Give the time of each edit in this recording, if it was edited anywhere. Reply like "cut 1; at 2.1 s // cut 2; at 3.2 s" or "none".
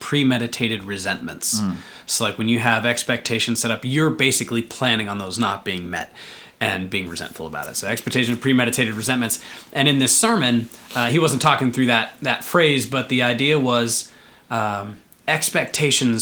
none

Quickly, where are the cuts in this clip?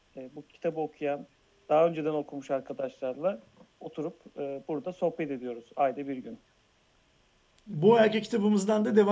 none

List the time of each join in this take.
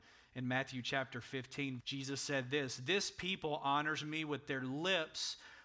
cut 1; at 1.8 s

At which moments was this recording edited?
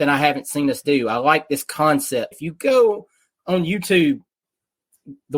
cut 1; at 2.3 s

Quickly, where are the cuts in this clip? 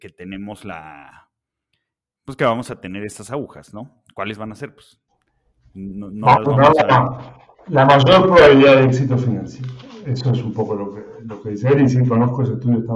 none

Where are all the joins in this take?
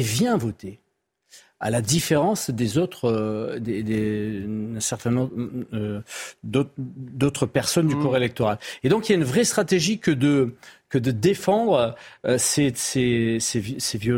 none

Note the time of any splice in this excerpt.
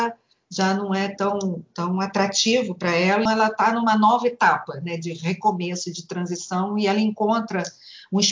cut 1; at 3.3 s

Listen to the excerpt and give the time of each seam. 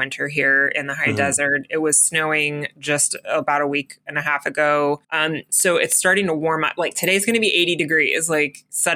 cut 1; at 5.0 s

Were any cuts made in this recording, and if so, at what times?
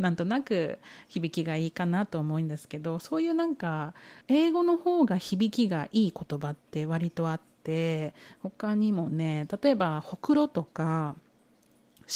cut 1; at 4.2 s

